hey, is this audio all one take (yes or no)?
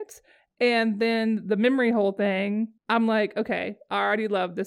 no